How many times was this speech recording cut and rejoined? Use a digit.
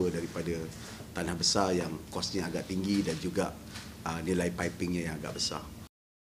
0